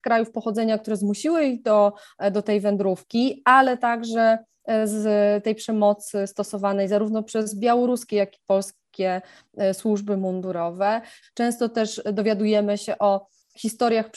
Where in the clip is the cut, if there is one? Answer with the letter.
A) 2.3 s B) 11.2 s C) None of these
B